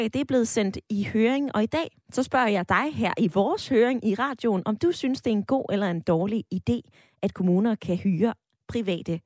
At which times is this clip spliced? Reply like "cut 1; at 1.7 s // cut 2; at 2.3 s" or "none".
none